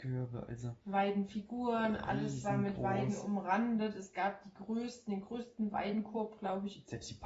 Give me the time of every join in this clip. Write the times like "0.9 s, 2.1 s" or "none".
none